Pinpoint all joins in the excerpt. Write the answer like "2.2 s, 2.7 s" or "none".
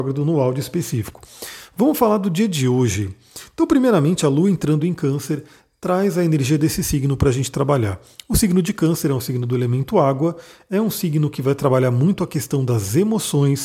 none